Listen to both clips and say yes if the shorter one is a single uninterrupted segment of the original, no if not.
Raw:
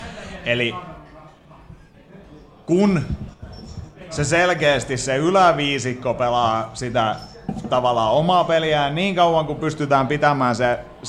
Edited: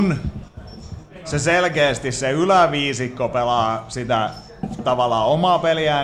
yes